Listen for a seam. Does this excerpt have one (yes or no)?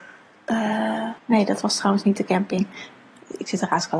yes